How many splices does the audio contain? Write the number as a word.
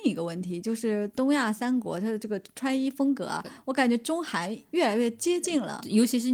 zero